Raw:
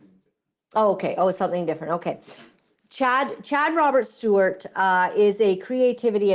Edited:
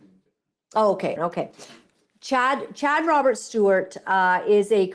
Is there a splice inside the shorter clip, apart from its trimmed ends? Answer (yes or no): yes